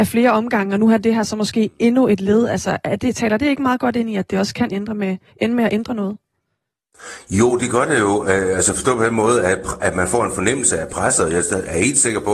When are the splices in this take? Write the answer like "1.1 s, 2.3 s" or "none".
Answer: none